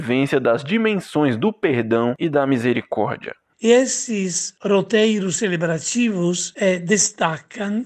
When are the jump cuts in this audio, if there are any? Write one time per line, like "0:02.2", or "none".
none